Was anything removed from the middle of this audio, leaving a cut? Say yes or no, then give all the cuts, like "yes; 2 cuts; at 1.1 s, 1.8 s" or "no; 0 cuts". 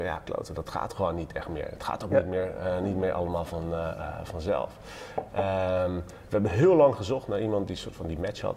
no; 0 cuts